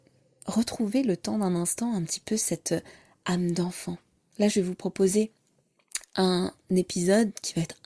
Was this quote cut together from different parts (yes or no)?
yes